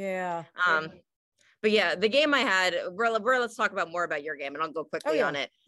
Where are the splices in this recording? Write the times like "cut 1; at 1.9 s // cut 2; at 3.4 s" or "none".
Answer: none